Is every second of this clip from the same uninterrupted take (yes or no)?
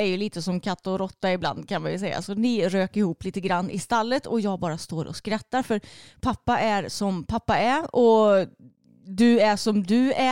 yes